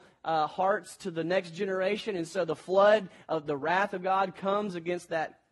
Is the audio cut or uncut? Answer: uncut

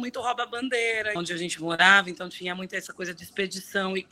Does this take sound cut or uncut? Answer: cut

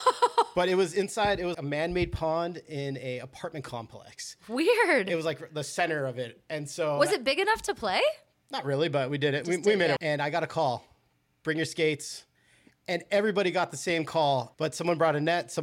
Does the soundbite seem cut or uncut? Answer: cut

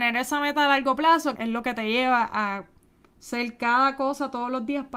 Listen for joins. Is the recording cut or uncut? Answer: cut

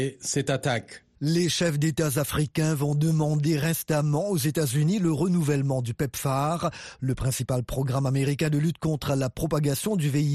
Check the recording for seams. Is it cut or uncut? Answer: cut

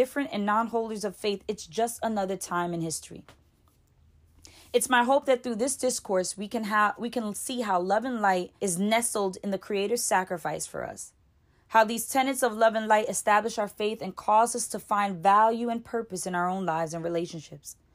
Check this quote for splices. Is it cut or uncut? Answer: cut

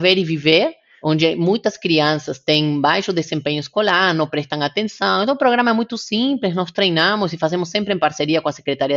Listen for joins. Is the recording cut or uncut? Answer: uncut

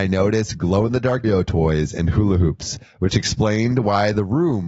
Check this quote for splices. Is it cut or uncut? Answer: cut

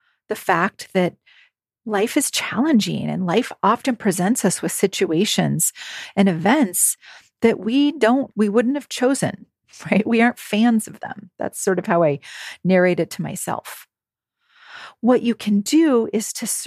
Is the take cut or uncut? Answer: cut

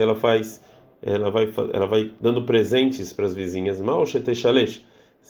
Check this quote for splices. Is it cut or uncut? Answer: cut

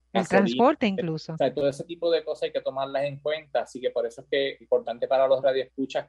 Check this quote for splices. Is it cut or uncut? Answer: cut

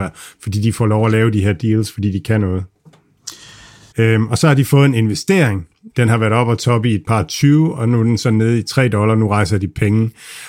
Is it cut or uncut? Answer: cut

